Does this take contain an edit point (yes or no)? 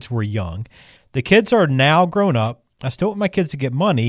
yes